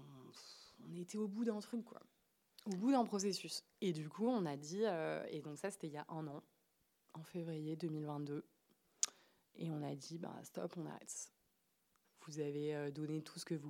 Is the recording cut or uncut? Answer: cut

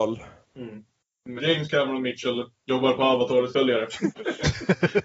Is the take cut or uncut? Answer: cut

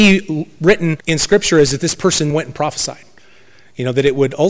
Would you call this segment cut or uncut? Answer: cut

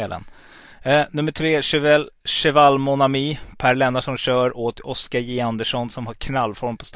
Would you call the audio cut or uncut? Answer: uncut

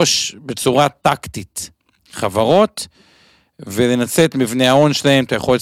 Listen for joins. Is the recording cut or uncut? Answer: uncut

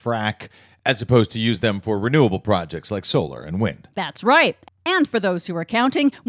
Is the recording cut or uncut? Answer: cut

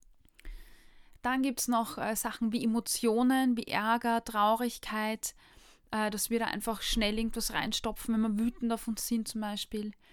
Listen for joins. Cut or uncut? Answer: uncut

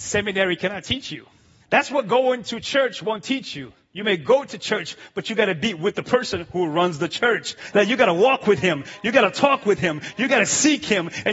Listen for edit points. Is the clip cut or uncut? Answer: cut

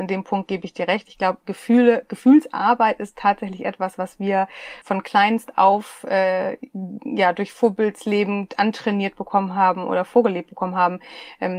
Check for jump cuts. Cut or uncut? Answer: cut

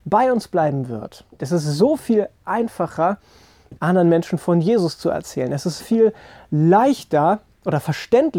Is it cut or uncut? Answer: cut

